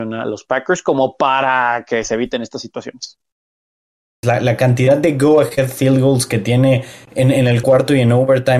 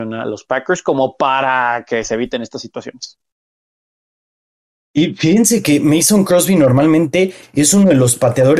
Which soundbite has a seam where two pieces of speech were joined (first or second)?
first